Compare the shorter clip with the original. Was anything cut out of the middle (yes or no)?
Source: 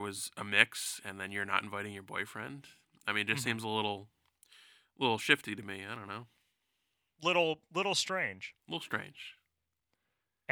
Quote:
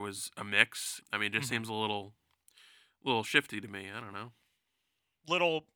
yes